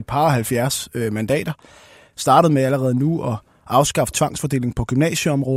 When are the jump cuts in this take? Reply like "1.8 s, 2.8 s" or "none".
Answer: 2.1 s